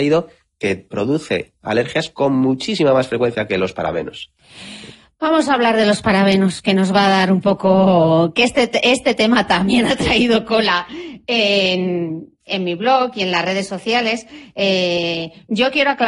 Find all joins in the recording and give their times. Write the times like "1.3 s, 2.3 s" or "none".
12.5 s